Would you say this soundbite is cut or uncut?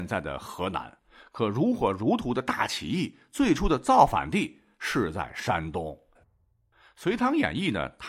cut